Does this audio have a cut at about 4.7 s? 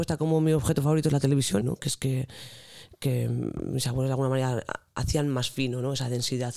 no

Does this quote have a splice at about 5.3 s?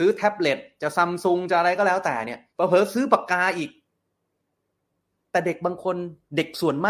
no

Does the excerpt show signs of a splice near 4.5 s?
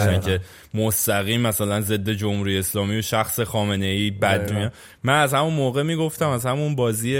yes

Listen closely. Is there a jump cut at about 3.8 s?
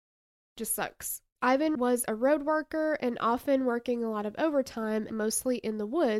no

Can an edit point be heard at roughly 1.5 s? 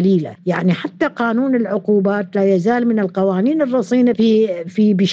no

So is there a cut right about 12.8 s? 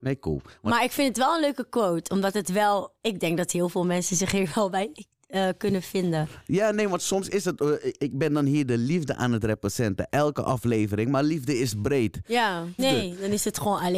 yes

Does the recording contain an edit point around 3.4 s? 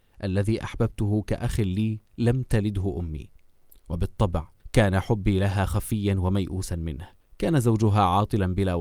no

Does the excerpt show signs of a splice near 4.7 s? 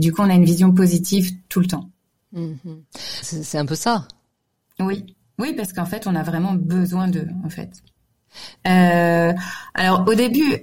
no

